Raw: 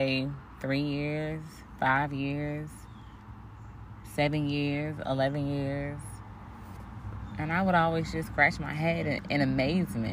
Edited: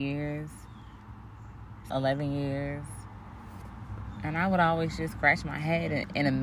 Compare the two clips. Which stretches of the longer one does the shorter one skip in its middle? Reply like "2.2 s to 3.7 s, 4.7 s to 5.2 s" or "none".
4.1 s to 5.0 s